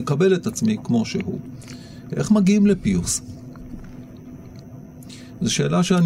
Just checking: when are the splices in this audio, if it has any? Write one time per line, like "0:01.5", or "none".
0:02.1